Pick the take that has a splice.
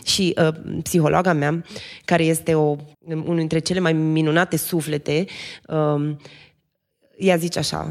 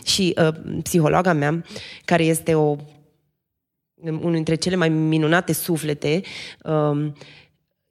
first; 1 cut; at 2.9 s

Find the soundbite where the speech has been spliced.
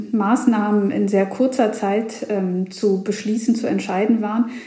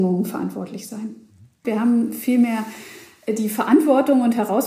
second; 1 cut; at 1.6 s

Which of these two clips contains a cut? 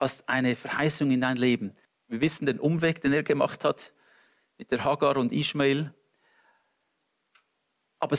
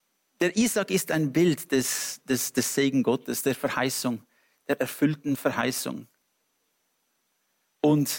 first; 1 cut; at 1.9 s

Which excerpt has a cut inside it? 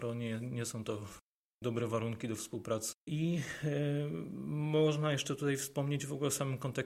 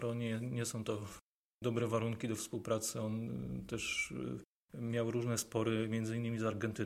first; 1 cut; at 2.9 s

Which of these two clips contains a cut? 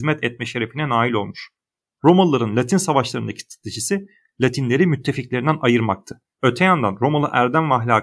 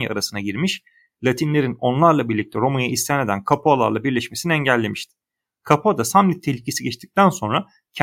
first; 2 cuts; at 2.0 s, 6.4 s

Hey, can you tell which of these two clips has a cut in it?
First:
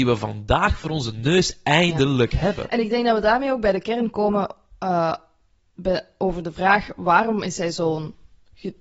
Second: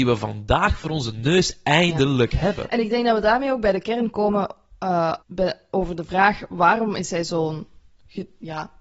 second; 1 cut; at 5.2 s

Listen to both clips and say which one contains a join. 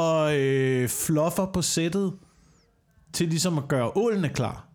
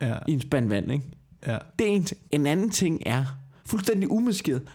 second; 2 cuts; at 2.3 s, 3.6 s

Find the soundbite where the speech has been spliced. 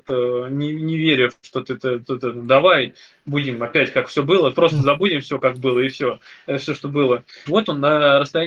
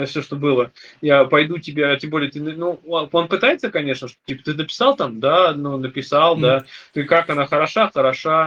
first; 1 cut; at 7.5 s

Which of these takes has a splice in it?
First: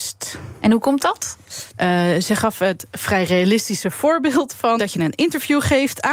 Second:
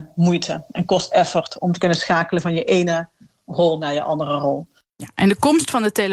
first; 2 cuts; at 1.7 s, 4.8 s

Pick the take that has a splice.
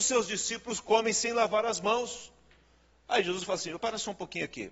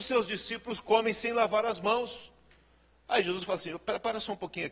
first; 1 cut; at 3.8 s

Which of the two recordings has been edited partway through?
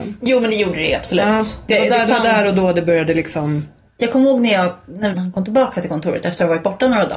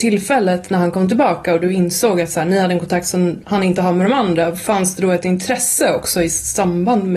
first; 2 cuts; at 3.9 s, 5.1 s

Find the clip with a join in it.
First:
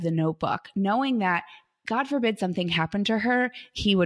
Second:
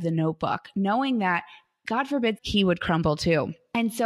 second; 1 cut; at 2.4 s

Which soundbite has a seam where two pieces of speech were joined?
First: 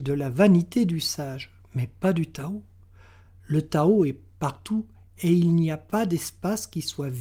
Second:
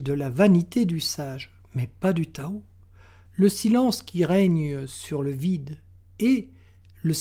second; 1 cut; at 3.3 s

